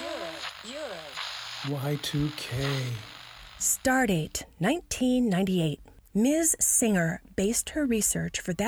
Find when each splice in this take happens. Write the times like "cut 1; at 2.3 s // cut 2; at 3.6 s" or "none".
cut 1; at 6.1 s